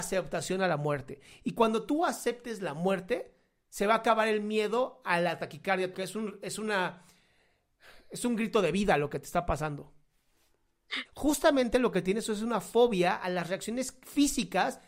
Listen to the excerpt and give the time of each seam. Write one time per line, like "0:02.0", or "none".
0:05.9
0:11.0